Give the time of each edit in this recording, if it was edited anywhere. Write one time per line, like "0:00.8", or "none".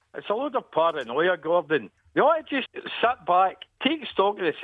0:02.6